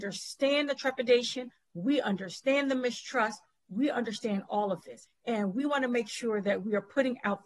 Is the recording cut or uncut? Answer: cut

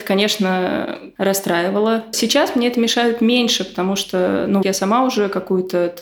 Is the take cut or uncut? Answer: cut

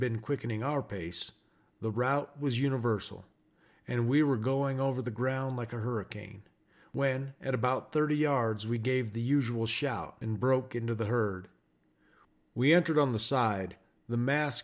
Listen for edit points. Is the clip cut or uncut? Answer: uncut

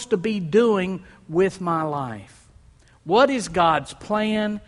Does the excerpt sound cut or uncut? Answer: uncut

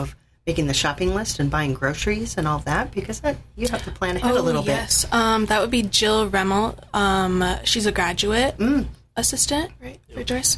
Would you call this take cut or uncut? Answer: uncut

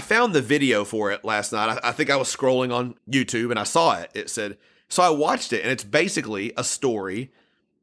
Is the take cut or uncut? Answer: cut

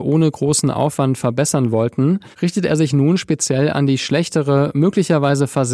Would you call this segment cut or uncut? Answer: cut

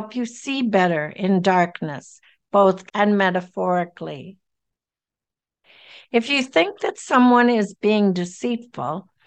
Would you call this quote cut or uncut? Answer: cut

